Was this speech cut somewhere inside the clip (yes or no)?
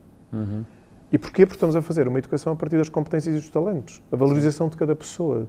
no